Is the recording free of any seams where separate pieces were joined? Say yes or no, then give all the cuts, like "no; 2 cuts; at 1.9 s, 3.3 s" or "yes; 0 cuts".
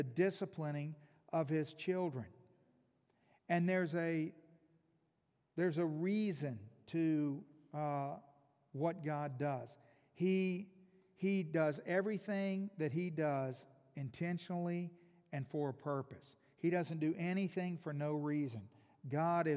yes; 0 cuts